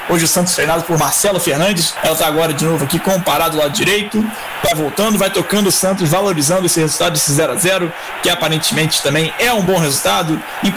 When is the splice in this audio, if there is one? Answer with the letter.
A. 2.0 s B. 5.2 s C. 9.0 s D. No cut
A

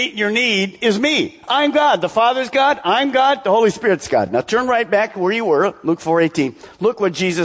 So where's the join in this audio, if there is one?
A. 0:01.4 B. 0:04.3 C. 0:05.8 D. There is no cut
D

